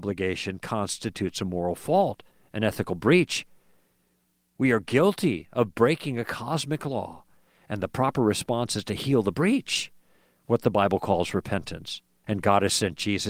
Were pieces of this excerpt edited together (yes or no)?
yes